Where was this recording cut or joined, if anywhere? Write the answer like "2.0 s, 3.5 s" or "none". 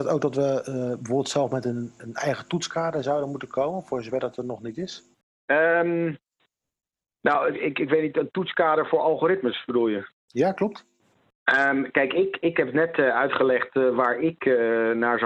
none